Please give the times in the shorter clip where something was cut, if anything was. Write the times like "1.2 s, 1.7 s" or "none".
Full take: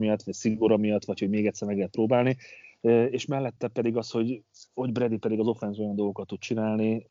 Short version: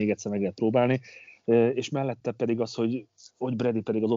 none

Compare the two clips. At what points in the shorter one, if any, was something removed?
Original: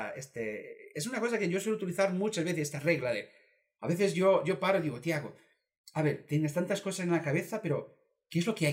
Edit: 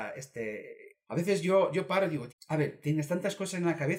0.9 s, 2.3 s

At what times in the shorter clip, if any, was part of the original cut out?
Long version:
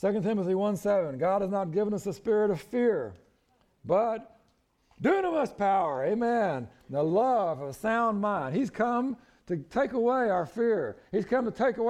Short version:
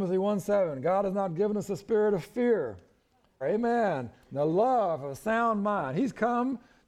3.4 s

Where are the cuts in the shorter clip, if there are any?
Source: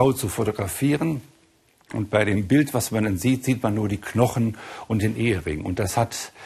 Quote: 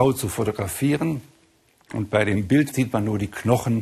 2.7 s

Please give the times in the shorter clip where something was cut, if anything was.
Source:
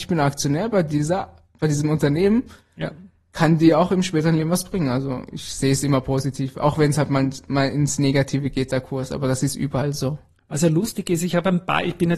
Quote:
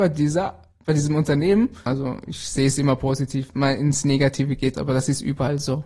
1.9 s, 3.5 s, 4.7 s

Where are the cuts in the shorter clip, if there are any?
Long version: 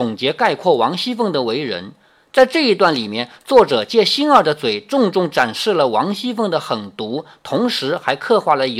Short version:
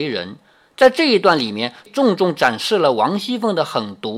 1.9 s

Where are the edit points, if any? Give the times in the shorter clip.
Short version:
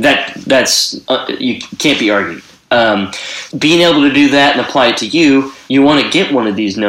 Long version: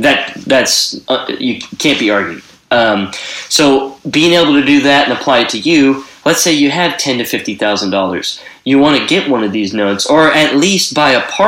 3.5 s, 5.7 s

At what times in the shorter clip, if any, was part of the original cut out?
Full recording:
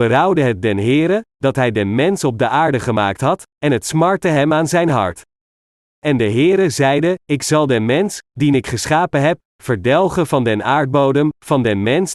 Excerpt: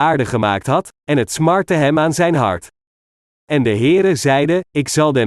none

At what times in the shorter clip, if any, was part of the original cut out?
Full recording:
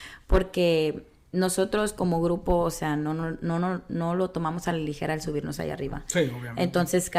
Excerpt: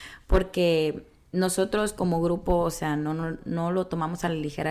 3.4 s

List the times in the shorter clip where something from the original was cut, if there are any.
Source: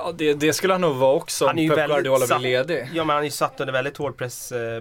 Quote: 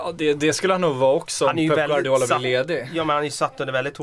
none

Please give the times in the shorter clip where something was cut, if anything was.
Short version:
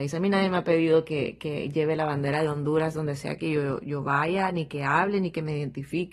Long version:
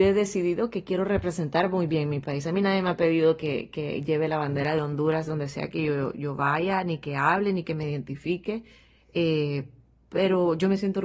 none

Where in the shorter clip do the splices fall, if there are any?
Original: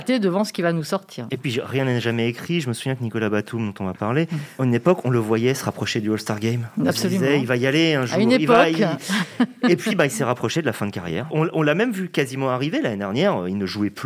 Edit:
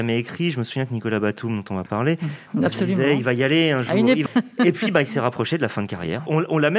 2.5 s, 4.3 s

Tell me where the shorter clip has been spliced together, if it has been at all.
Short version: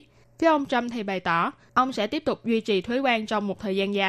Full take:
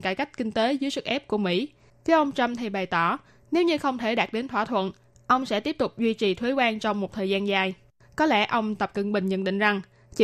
1.7 s

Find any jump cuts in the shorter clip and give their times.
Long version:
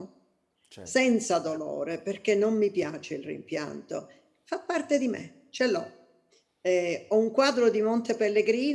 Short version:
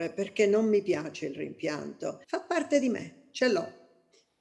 2.2 s

